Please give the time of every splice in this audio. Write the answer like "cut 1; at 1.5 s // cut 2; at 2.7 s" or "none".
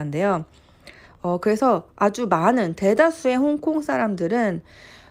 cut 1; at 1.1 s